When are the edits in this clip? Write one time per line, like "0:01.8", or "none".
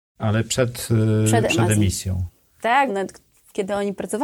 0:01.5
0:02.9